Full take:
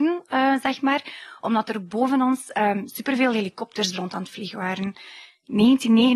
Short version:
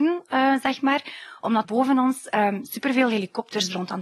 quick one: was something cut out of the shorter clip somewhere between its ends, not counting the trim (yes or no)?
yes